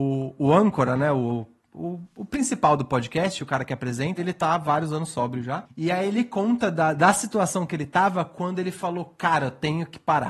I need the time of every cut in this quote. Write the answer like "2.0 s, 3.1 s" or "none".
4.2 s